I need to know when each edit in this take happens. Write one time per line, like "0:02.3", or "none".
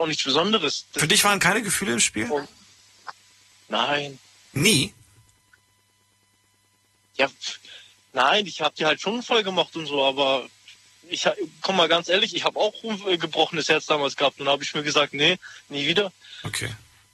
none